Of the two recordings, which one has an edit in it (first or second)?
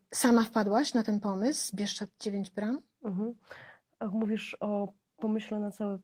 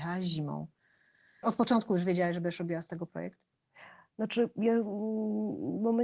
second